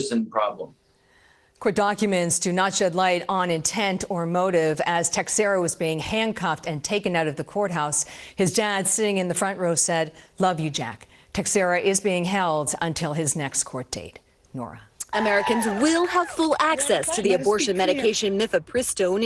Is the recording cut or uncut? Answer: cut